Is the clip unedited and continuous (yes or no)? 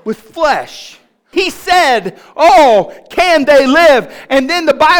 no